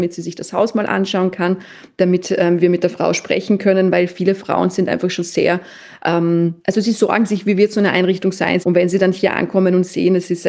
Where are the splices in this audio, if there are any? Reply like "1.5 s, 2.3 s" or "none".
6.6 s, 8.6 s